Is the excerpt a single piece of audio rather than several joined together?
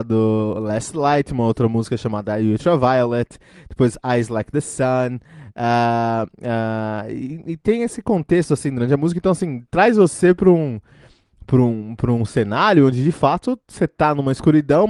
yes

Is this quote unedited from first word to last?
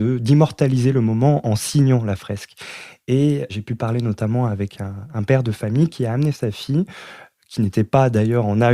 yes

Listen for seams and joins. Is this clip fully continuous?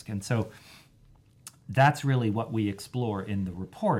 yes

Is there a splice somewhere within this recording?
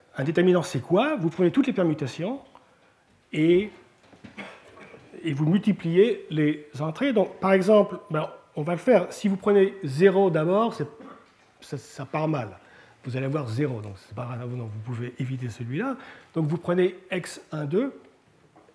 no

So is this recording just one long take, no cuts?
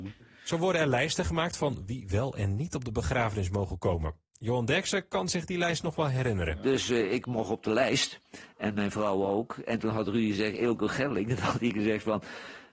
yes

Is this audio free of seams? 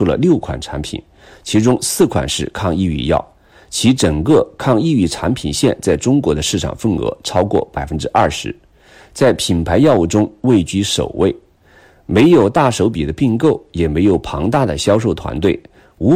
yes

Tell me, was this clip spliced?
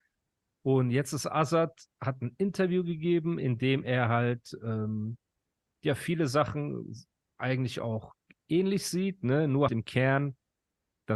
yes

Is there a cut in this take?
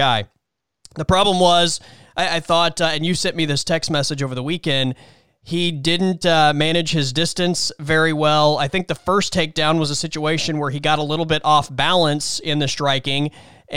no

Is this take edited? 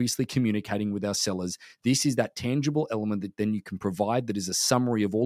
no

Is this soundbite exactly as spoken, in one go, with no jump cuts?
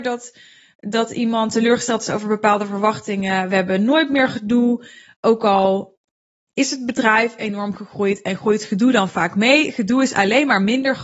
yes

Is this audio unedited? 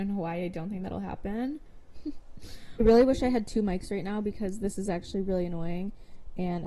no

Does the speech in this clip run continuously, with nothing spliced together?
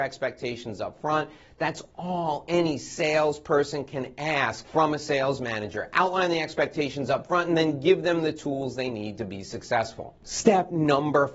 yes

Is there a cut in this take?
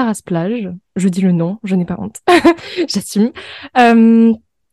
no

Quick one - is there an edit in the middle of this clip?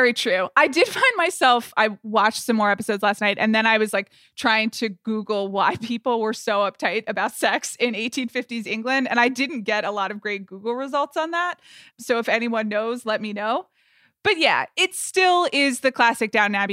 no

